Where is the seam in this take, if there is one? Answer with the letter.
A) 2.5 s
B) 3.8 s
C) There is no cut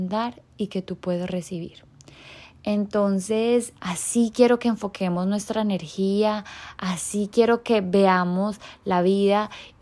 B